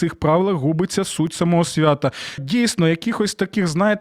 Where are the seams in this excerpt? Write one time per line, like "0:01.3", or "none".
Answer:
0:02.4

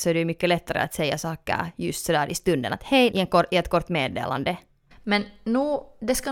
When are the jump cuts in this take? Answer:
0:03.1
0:04.9

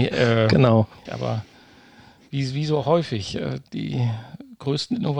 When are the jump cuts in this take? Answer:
0:01.1

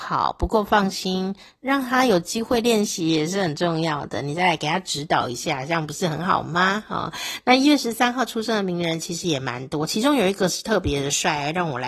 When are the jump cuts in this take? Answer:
none

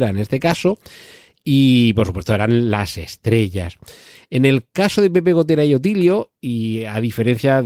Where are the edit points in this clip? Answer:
none

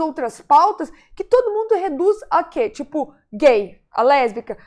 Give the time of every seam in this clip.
none

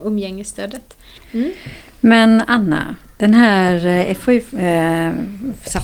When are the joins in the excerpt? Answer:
0:01.2

